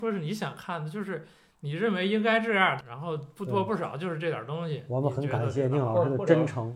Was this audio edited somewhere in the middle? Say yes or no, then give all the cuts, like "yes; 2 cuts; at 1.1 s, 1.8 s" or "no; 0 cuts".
yes; 1 cut; at 2.8 s